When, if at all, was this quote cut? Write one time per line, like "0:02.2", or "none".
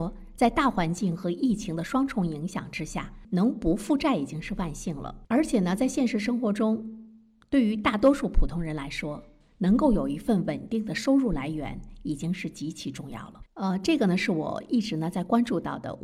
0:05.3
0:13.5